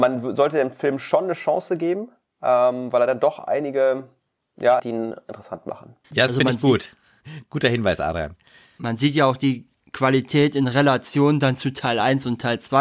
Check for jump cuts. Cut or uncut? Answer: cut